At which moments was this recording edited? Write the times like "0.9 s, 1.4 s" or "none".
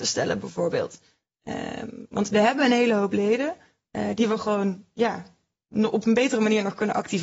none